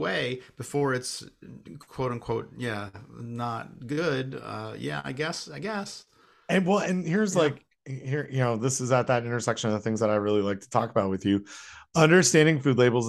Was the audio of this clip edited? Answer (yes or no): no